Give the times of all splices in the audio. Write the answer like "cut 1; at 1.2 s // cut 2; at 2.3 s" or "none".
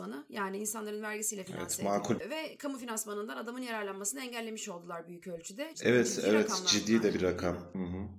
cut 1; at 2.2 s // cut 2; at 5.7 s